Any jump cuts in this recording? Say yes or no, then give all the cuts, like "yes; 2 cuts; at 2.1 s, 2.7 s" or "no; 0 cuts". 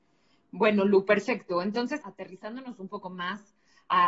yes; 1 cut; at 2.0 s